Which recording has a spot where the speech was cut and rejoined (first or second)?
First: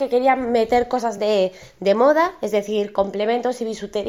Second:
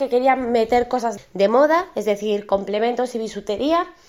second